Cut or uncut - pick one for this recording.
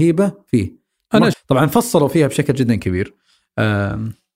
cut